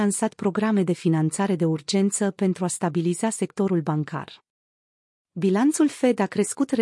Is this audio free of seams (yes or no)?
yes